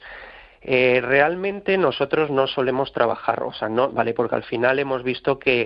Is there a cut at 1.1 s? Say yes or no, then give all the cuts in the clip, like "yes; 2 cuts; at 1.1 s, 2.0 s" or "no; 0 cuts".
no; 1 cut; at 3.9 s